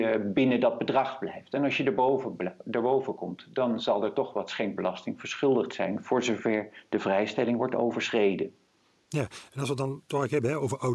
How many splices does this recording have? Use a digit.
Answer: 0